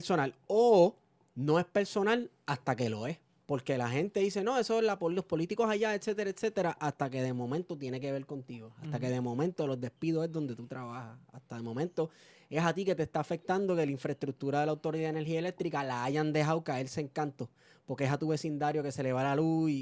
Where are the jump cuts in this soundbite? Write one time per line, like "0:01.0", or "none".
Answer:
none

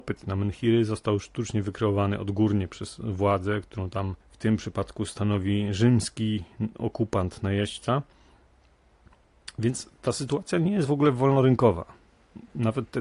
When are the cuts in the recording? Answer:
0:04.2

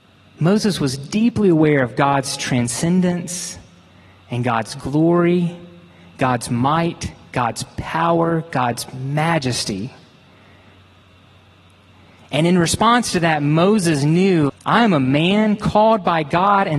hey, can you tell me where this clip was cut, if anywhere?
0:14.5

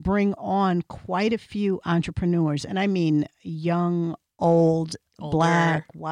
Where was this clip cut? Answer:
0:05.1

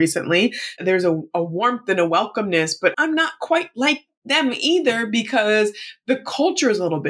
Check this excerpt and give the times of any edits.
0:02.9

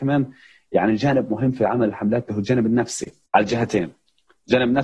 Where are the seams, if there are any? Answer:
0:03.3

